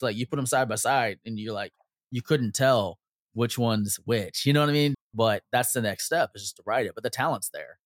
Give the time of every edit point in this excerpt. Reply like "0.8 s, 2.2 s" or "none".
4.9 s